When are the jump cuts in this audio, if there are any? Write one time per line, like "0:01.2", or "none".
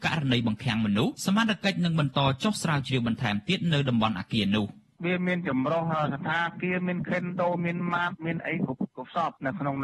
0:01.1